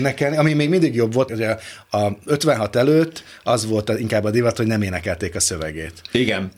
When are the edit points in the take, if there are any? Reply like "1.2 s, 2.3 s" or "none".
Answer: 1.3 s